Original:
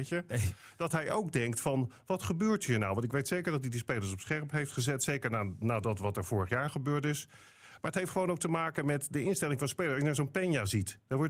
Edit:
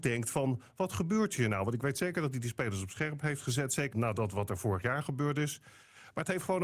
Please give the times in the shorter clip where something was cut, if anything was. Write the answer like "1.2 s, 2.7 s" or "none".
3.9 s